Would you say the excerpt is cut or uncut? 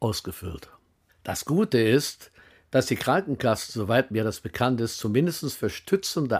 uncut